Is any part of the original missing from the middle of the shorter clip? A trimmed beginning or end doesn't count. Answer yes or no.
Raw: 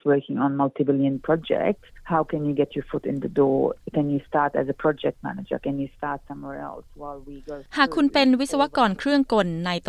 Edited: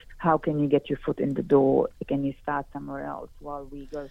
yes